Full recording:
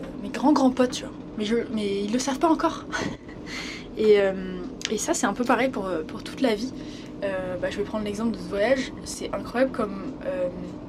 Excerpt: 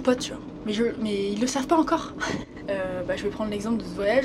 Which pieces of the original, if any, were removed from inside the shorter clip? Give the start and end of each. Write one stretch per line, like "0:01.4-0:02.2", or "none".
0:03.3-0:07.2